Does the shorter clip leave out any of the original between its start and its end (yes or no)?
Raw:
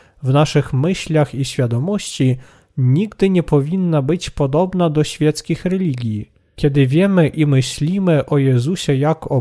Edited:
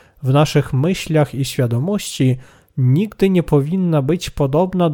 no